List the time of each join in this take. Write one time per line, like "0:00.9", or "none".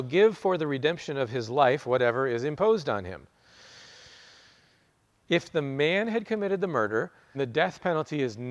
0:05.2
0:07.3